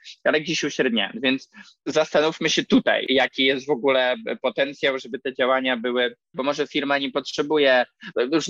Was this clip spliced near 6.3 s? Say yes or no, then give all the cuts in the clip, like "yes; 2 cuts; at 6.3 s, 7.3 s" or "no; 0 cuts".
yes; 2 cuts; at 5.0 s, 6.3 s